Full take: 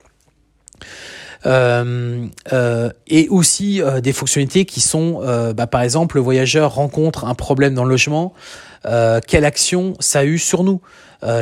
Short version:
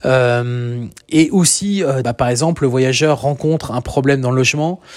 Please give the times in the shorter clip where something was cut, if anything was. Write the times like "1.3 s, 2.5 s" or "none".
1.0 s, 2.0 s